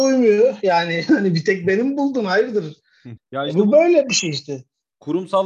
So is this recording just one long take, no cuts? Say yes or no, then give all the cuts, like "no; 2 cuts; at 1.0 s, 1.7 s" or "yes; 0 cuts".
no; 1 cut; at 3.2 s